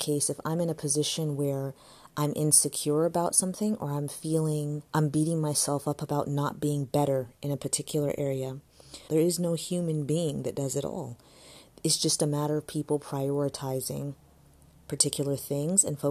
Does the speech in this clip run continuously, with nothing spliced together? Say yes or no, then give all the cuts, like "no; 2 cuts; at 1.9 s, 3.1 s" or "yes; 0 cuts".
no; 2 cuts; at 4.9 s, 9.1 s